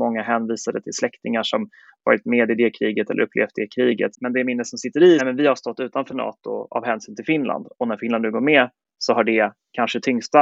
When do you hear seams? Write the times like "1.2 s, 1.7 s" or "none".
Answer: 4.1 s, 5.2 s

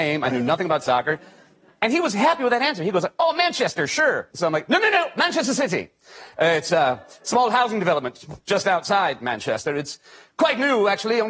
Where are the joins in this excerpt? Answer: 4.3 s

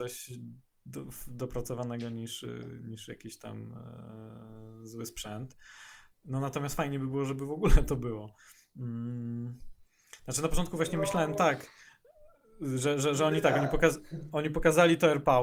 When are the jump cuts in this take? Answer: none

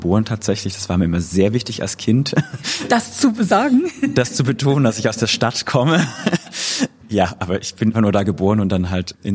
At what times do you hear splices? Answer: 7.9 s

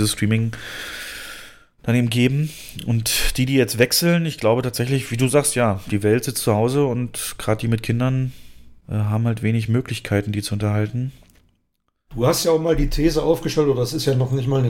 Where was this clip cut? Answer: none

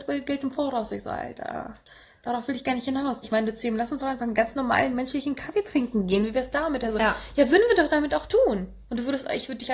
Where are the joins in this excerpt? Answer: 3.2 s

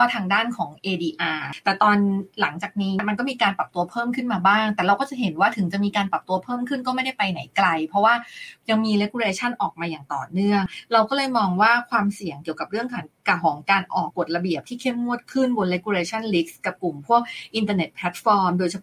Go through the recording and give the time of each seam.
14.1 s

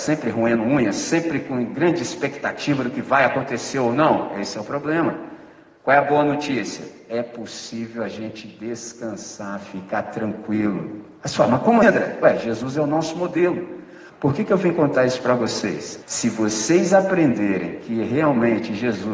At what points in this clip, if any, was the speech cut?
11.8 s, 14.1 s, 16.0 s

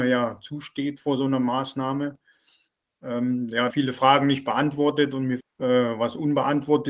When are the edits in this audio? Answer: 3.7 s, 5.4 s

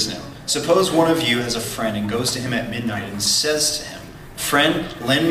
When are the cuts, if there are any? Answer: none

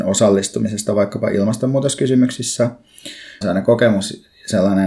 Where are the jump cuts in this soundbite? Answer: 3.4 s

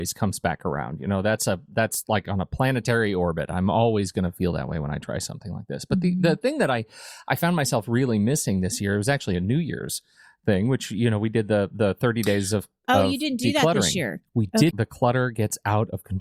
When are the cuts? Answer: 14.7 s

